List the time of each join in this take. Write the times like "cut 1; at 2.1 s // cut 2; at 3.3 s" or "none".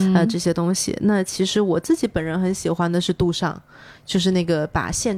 none